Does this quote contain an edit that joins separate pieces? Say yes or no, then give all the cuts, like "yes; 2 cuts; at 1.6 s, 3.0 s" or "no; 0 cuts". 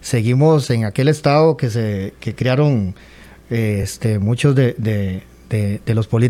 no; 0 cuts